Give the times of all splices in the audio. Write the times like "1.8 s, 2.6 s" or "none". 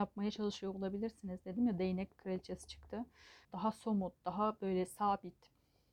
3.4 s